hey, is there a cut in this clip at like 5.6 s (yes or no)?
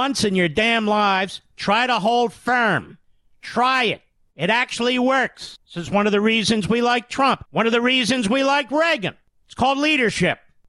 no